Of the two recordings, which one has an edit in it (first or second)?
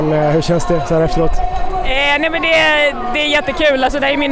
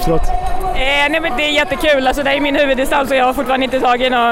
second